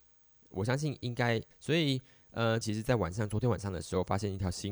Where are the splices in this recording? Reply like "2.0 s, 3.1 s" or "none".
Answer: 1.5 s, 2.6 s